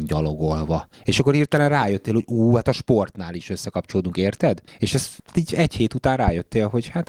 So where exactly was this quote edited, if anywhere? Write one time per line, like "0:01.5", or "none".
none